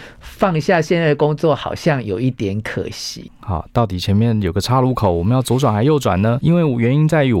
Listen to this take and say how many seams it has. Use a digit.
2